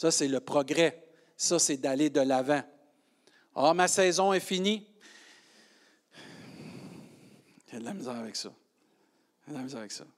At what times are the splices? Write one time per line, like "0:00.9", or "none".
none